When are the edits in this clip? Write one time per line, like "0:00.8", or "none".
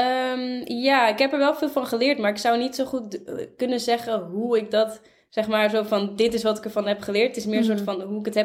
none